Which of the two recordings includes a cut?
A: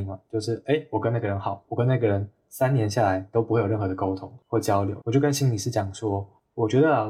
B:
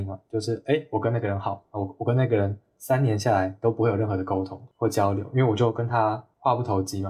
A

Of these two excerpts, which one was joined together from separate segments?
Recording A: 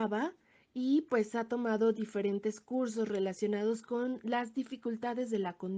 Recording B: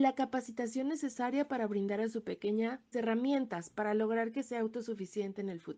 B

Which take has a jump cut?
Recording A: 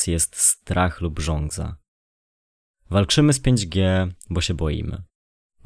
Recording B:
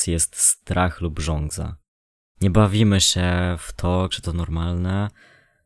B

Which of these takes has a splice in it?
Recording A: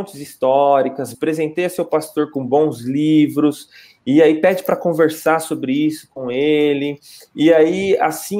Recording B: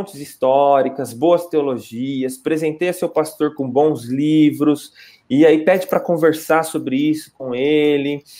A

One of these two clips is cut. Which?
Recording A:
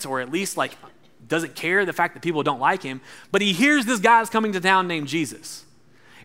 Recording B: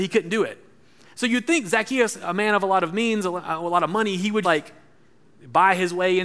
B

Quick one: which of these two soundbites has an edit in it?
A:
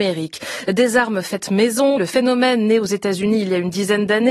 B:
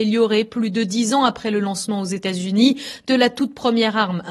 A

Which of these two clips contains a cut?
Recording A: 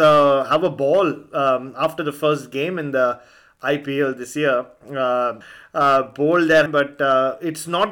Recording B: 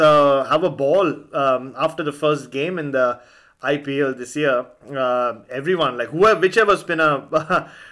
A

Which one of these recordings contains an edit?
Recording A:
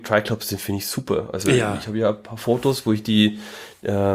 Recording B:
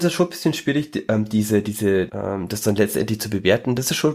B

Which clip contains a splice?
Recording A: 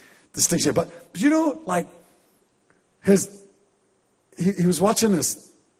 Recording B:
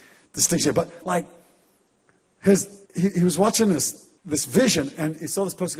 B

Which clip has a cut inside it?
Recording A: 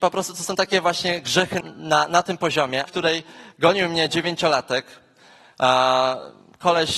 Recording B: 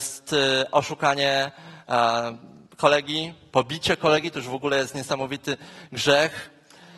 A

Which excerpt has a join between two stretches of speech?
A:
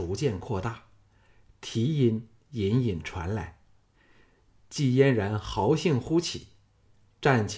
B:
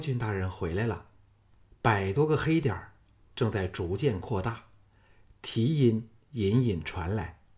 B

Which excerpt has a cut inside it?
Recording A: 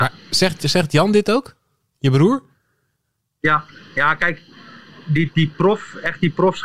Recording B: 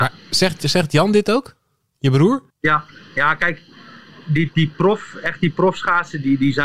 B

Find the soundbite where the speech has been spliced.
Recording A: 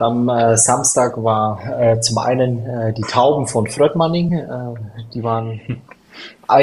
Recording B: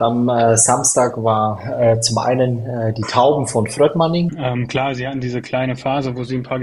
B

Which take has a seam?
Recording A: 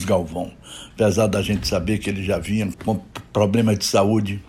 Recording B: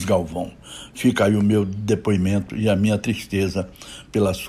A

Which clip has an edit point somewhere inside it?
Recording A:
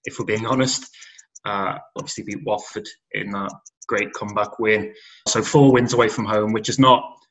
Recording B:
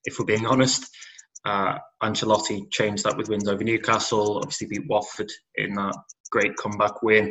A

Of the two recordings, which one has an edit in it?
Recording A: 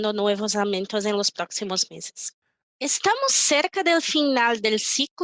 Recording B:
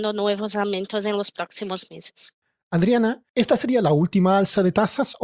A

